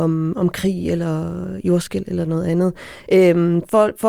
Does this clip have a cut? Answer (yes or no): no